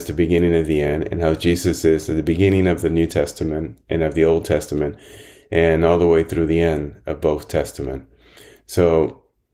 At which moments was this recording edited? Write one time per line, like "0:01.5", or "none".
none